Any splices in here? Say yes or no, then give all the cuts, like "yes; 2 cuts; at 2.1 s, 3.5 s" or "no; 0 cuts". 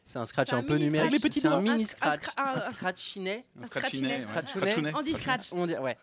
no; 0 cuts